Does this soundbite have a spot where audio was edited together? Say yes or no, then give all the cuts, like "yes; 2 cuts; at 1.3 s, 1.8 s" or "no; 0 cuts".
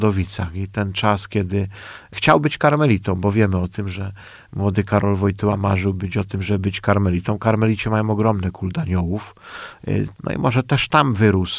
yes; 1 cut; at 10.1 s